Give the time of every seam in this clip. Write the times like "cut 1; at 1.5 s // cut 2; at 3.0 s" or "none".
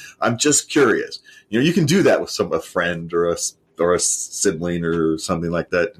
none